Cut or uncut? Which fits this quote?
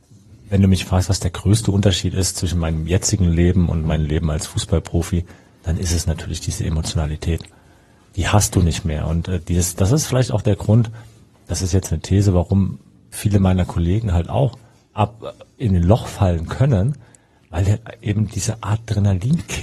uncut